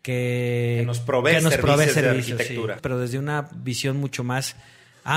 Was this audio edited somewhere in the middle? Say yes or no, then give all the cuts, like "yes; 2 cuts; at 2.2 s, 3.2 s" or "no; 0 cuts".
yes; 1 cut; at 2.8 s